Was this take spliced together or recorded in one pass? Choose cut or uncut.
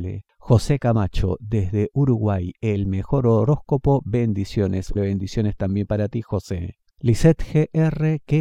cut